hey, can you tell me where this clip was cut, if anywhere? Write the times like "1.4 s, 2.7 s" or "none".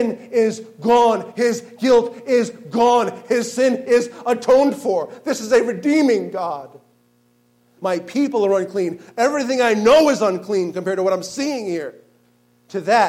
7.8 s